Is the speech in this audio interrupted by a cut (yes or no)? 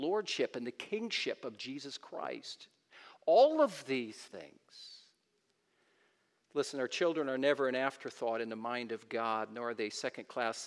no